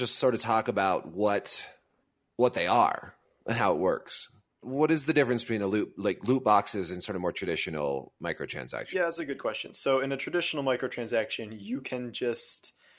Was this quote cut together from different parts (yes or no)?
no